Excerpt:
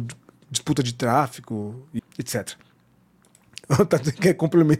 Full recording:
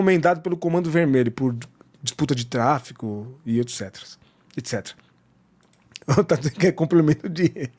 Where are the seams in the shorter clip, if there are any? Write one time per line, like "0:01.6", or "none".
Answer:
0:02.0